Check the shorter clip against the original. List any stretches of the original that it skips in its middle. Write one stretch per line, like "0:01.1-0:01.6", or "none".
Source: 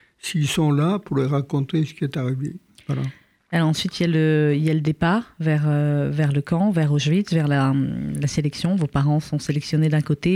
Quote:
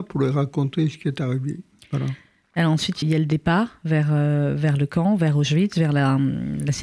0:04.0-0:04.6